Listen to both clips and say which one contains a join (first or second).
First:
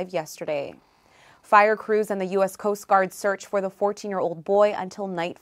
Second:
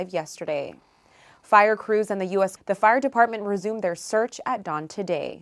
second